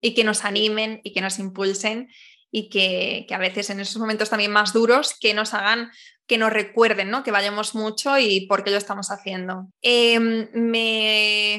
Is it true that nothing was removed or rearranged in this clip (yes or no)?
no